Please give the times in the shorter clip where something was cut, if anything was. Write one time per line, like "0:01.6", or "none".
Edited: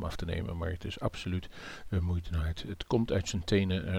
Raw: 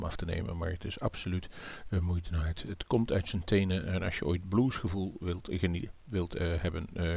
none